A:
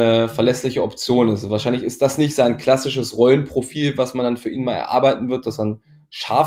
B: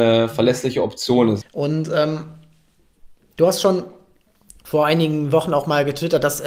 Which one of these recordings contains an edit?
B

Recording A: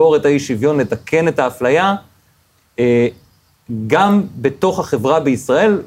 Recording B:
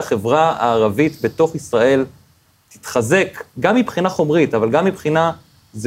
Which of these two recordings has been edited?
B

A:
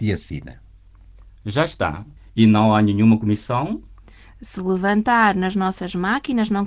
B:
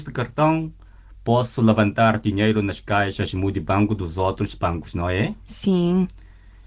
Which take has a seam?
A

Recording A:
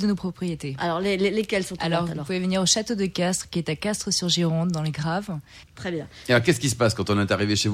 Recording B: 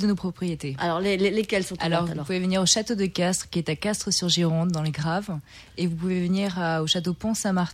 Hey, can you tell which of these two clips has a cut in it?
A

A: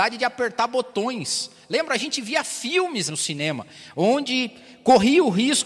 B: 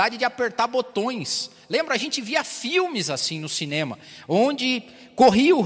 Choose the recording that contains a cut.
A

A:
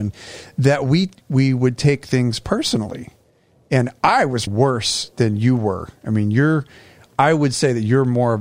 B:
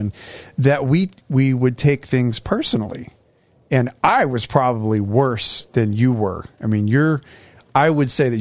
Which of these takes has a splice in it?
A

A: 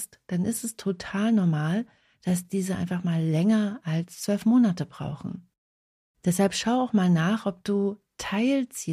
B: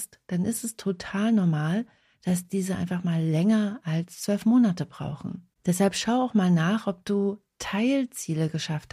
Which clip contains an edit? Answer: B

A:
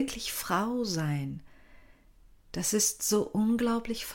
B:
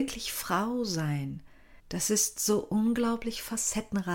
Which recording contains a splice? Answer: B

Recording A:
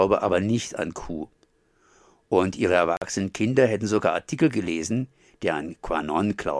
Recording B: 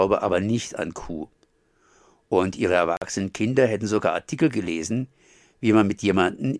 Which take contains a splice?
A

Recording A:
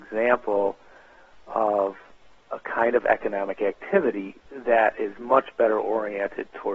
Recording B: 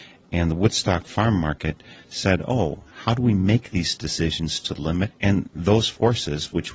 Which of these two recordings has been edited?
B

